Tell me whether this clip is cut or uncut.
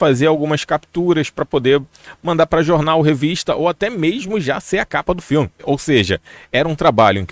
cut